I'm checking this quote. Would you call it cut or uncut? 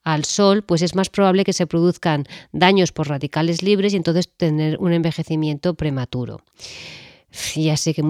uncut